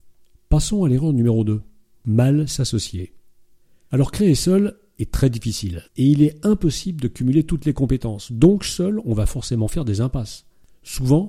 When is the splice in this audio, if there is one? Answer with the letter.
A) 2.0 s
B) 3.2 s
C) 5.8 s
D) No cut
C